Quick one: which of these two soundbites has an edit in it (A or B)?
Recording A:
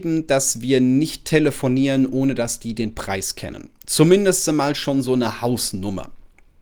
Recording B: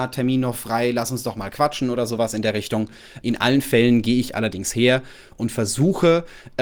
B